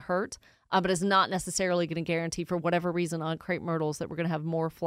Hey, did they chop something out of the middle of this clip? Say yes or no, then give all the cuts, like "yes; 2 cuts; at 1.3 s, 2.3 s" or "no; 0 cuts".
no; 0 cuts